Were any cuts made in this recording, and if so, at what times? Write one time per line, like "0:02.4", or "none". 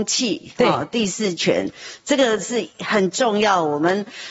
none